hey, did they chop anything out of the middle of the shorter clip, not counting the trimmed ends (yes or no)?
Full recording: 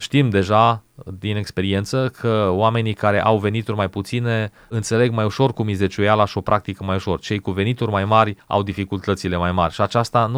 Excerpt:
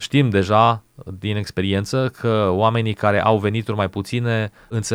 no